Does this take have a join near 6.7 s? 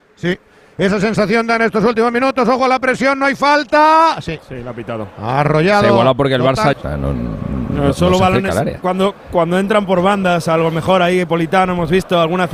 yes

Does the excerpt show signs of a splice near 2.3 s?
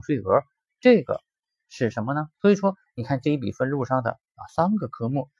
yes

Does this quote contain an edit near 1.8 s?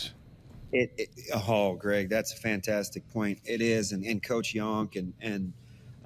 no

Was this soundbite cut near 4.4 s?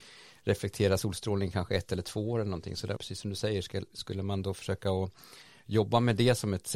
no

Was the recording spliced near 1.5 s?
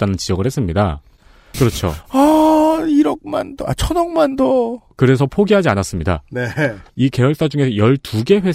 yes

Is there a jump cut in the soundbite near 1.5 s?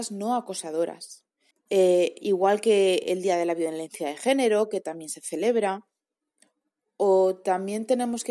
yes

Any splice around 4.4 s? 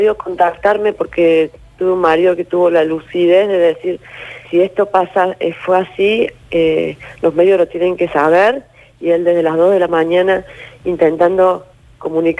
yes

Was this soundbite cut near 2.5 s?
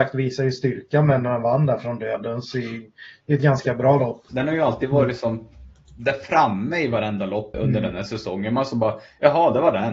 no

